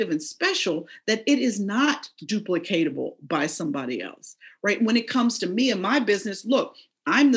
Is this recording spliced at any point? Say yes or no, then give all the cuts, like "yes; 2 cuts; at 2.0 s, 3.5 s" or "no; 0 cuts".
no; 0 cuts